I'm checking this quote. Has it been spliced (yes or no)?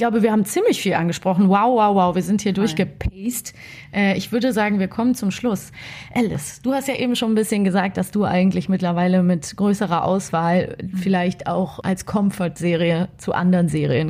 no